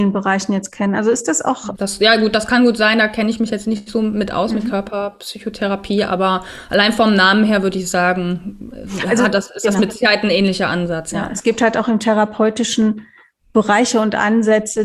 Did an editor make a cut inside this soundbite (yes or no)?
yes